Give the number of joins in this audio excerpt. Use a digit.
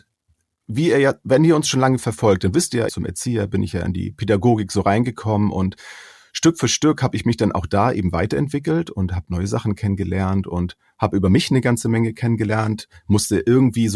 1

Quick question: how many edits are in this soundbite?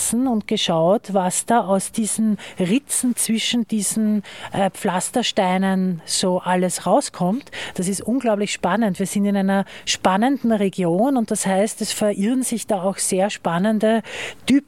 0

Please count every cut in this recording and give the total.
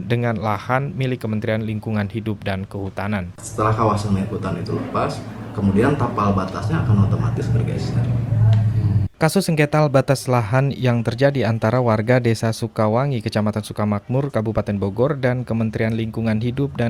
2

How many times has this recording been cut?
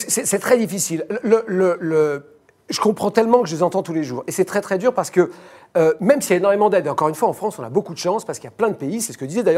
0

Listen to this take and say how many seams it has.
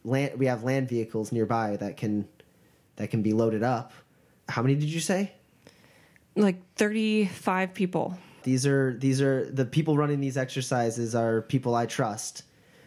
2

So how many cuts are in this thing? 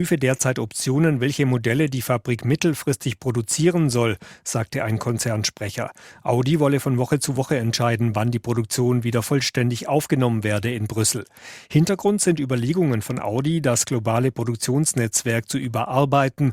0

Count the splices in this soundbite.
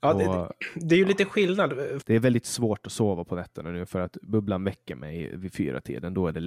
1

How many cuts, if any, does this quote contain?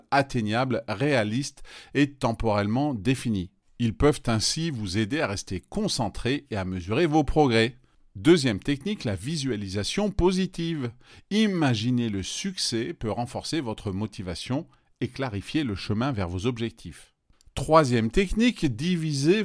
0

